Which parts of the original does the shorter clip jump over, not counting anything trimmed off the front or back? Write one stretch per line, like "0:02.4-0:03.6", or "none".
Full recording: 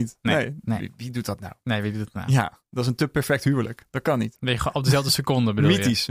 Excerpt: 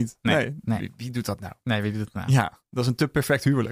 none